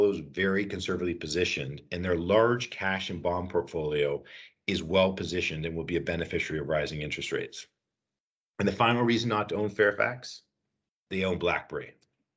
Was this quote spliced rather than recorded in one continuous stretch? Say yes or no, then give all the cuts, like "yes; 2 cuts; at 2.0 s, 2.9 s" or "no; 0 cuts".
no; 0 cuts